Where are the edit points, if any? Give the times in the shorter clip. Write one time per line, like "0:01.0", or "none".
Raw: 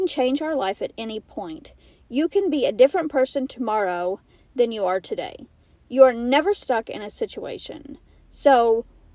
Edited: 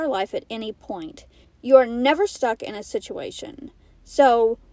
0:01.4